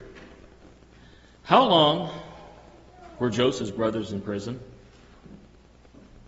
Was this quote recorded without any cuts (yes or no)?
yes